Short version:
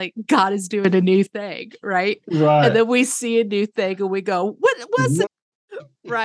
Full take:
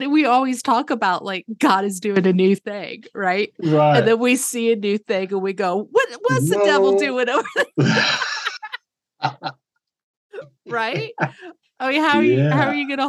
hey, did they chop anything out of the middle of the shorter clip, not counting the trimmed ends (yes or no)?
yes